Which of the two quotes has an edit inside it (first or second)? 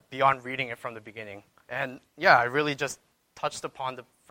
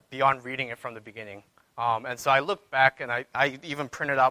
first